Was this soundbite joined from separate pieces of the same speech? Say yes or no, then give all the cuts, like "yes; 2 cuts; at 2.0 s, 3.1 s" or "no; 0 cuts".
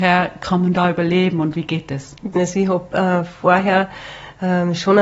yes; 1 cut; at 2.3 s